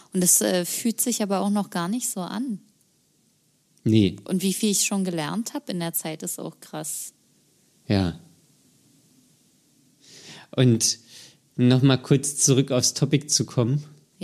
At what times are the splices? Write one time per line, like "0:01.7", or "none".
none